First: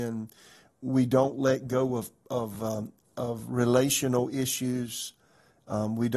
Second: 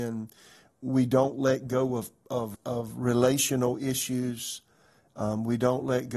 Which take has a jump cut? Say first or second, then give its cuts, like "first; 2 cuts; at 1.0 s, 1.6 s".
second; 1 cut; at 2.5 s